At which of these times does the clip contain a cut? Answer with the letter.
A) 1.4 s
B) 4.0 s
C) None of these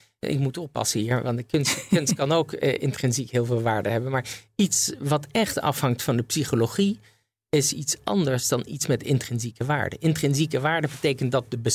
C